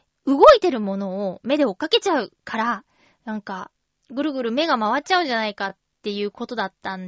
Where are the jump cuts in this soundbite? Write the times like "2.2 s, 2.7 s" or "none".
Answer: none